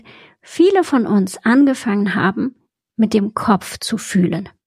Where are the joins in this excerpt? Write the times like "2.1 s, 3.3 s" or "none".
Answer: none

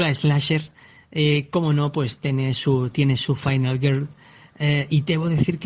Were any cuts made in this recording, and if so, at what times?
none

